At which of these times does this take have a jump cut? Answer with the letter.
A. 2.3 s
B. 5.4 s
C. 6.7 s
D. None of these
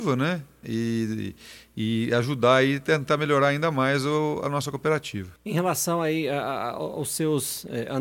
B